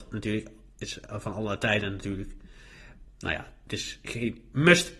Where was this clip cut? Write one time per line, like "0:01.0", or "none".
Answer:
0:03.1